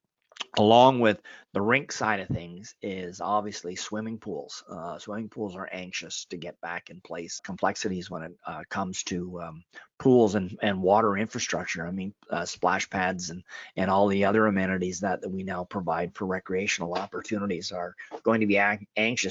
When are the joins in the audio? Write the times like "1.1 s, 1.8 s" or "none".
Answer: 7.4 s